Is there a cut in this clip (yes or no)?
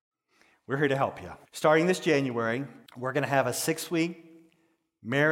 yes